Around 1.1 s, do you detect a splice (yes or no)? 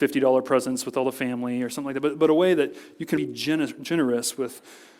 no